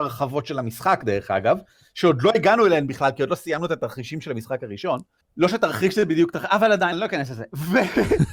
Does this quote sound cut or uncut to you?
cut